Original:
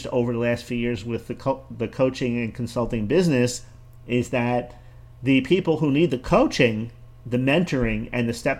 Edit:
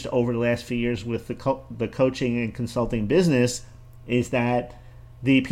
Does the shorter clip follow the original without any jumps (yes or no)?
yes